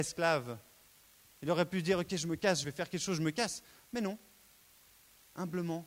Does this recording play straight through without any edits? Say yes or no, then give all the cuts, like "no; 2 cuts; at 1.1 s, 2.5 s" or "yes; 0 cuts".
yes; 0 cuts